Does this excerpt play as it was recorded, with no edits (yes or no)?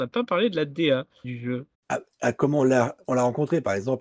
no